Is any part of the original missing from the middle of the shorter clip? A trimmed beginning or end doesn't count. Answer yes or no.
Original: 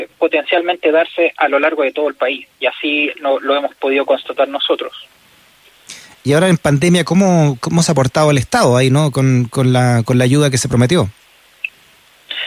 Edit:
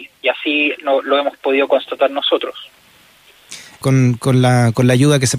yes